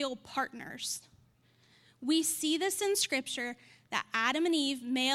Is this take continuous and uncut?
yes; 0 cuts

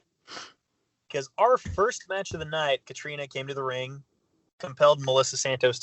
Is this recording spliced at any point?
yes; 1 cut; at 2.8 s

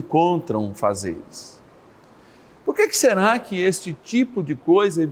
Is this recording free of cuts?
yes; 0 cuts

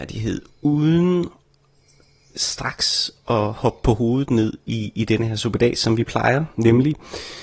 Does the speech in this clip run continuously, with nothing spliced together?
yes; 0 cuts

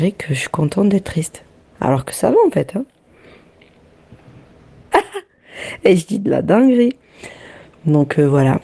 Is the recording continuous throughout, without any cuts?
no; 2 cuts; at 1.7 s, 4.9 s

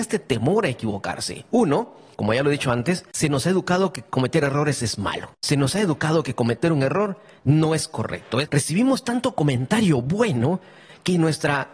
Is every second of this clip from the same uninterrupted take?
no; 1 cut; at 8.4 s

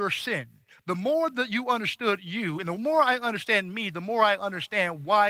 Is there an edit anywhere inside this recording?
no; 0 cuts

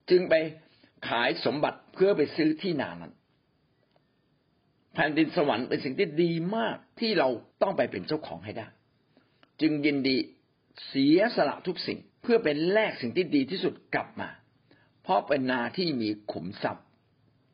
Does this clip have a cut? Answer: yes; 2 cuts; at 7.5 s, 12.1 s

